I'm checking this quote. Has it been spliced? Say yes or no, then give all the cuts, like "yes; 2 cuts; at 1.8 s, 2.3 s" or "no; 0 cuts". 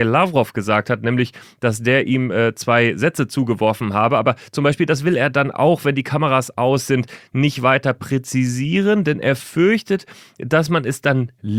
no; 0 cuts